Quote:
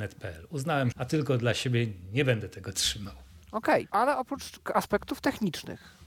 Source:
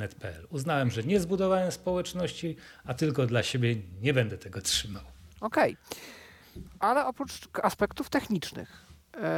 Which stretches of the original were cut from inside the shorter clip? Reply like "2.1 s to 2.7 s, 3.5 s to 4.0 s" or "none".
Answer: 0.9 s to 2.8 s, 5.8 s to 6.8 s